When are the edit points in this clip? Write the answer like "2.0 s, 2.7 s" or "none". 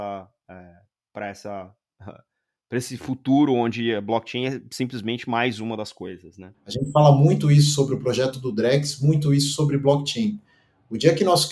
6.5 s